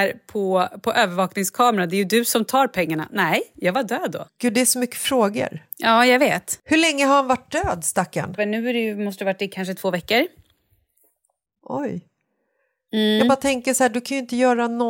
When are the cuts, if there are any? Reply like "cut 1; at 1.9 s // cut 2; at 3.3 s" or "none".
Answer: cut 1; at 4.3 s // cut 2; at 8.4 s